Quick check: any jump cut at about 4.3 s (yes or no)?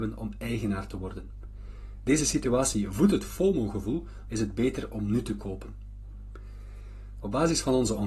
yes